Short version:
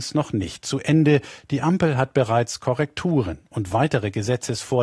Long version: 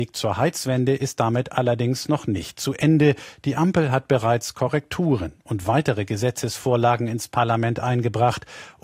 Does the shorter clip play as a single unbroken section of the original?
yes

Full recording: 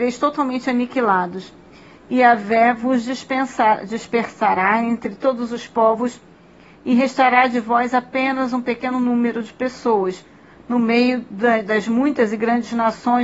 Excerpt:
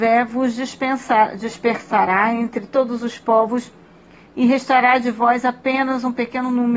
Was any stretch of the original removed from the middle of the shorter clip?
no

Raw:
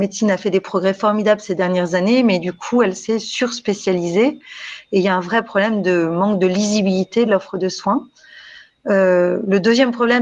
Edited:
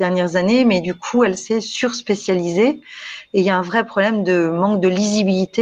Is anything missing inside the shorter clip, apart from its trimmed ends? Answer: no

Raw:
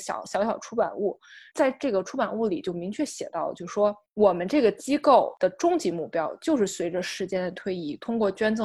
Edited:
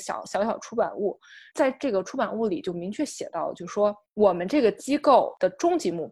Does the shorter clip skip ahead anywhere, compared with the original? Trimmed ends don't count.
no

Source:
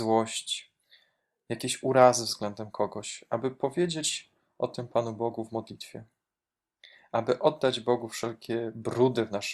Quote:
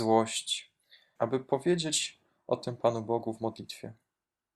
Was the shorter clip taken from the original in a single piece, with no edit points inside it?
no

